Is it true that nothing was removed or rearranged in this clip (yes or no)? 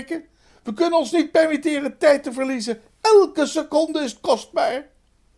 yes